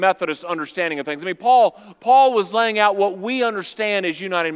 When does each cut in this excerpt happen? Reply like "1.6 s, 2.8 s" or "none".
1.9 s